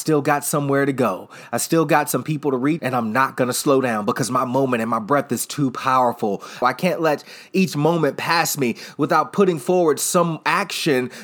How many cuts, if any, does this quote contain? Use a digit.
2